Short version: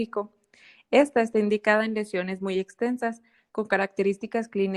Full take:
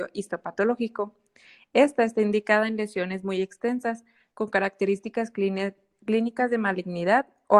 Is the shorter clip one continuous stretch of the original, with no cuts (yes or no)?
yes